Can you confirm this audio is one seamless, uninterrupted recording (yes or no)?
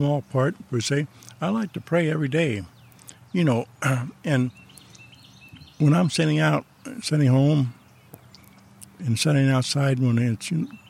yes